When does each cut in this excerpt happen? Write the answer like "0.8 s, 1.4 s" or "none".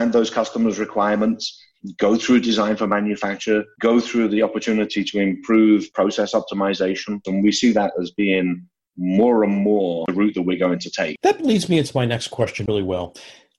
7.2 s